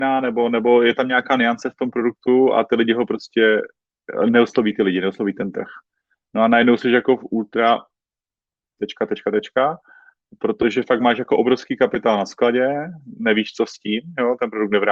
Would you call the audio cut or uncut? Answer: uncut